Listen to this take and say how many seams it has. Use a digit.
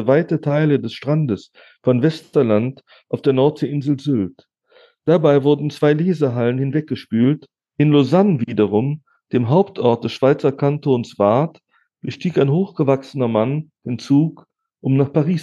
1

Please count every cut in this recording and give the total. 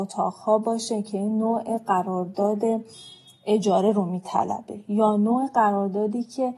0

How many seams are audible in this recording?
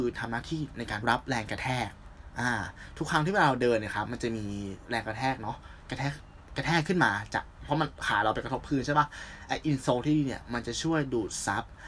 1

